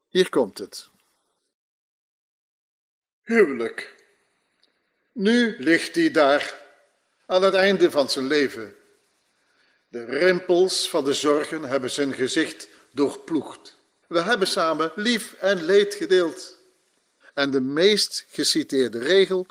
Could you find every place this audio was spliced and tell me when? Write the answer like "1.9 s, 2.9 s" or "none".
14.0 s, 17.2 s